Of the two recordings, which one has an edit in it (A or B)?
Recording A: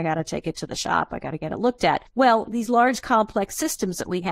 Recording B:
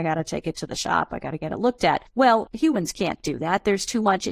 B